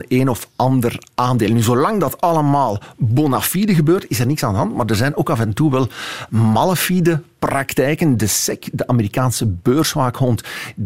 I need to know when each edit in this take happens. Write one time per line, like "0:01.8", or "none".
none

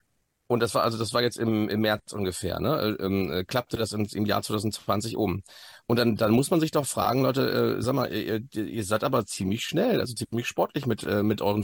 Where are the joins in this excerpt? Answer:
none

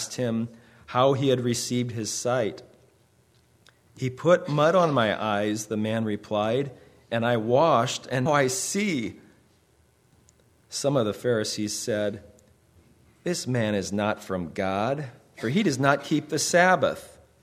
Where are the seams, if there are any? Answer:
0:08.3

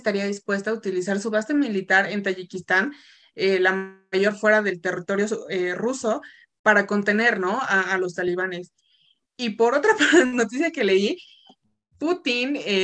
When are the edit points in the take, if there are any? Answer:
0:09.2

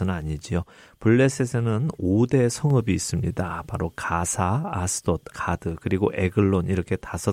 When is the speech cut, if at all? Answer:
0:05.3

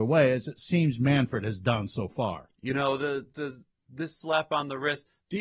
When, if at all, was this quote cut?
0:02.5

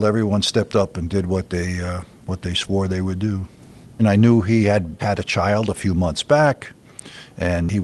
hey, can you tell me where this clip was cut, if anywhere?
0:04.0
0:05.0

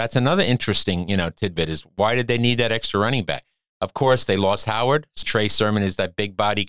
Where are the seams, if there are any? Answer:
0:05.2

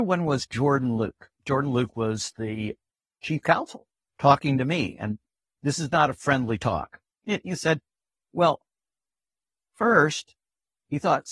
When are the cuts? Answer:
0:04.0
0:07.2

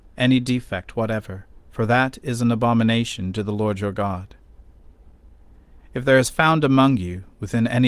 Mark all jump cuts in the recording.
0:01.6

